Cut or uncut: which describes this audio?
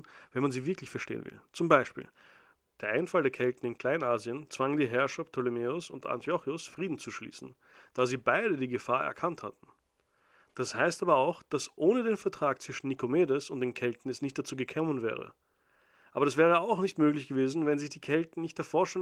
uncut